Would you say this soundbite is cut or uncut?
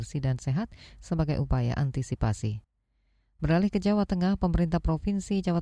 uncut